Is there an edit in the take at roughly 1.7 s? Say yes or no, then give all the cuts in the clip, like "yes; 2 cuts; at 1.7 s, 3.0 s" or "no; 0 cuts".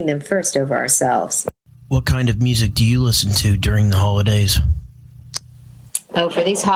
no; 0 cuts